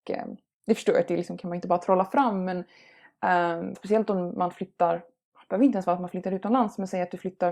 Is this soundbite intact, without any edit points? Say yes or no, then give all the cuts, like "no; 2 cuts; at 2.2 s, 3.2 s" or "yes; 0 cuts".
no; 1 cut; at 3.7 s